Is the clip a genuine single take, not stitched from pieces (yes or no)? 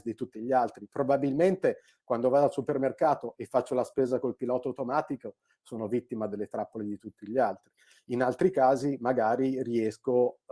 yes